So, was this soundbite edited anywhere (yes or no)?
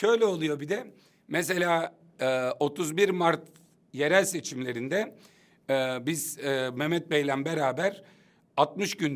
no